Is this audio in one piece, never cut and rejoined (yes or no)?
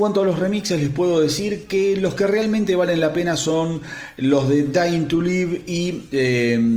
yes